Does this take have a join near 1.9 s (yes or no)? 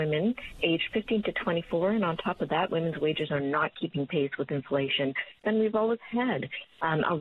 no